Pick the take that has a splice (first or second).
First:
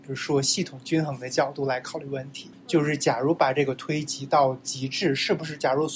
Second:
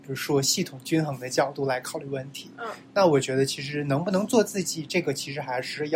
first